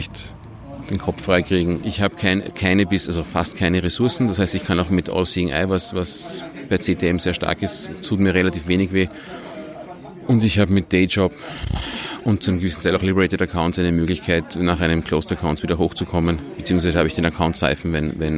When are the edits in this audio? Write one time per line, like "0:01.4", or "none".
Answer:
0:01.8